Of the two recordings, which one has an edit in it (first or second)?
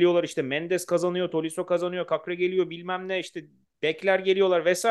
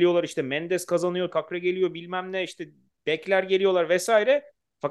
second